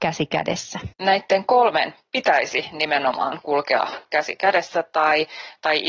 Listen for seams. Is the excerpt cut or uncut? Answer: cut